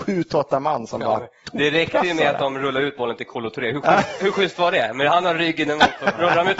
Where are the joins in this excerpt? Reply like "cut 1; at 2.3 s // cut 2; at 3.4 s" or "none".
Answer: none